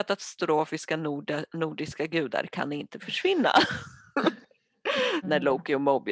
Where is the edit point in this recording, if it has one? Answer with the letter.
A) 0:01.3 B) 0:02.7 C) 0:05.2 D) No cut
C